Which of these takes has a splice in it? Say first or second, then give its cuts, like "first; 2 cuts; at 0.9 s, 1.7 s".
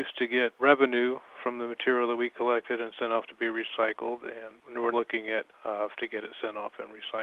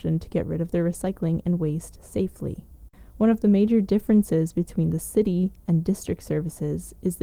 first; 2 cuts; at 4.9 s, 5.9 s